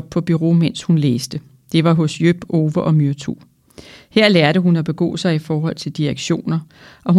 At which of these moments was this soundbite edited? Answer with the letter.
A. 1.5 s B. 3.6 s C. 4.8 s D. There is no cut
D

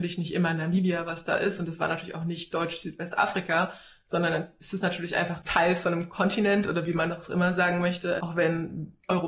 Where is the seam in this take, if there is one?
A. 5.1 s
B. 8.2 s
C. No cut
B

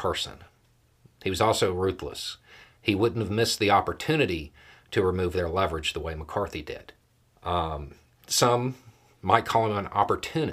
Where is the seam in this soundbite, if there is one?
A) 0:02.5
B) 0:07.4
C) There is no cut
B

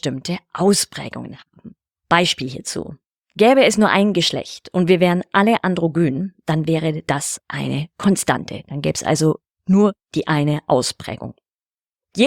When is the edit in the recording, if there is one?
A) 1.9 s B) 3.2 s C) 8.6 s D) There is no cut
A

